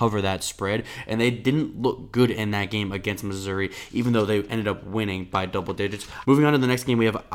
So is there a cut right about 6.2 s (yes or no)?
yes